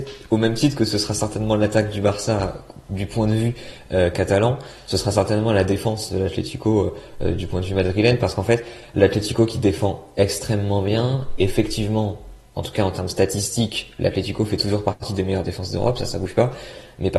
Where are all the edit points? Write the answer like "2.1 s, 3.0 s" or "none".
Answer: none